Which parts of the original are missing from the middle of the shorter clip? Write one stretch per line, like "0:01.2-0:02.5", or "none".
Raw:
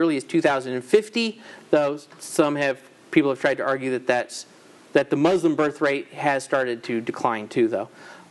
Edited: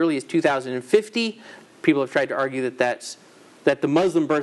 0:01.6-0:02.9